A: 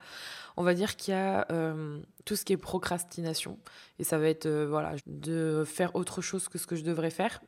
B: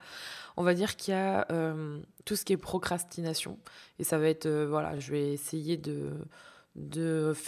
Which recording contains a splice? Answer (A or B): A